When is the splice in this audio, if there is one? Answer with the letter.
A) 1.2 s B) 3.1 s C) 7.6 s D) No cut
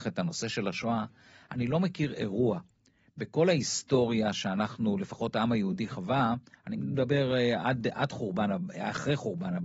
D